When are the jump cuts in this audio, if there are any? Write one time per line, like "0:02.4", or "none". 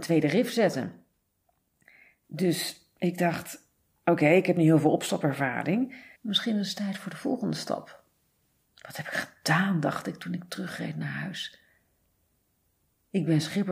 0:06.2
0:08.6